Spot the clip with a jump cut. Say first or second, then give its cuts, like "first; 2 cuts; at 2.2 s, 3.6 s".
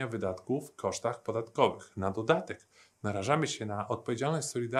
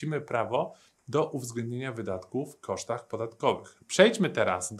second; 1 cut; at 3.8 s